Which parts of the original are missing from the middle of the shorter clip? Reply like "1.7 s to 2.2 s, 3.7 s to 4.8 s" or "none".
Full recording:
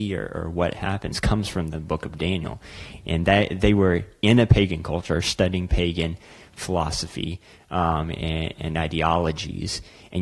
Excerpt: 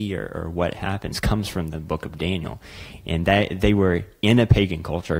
none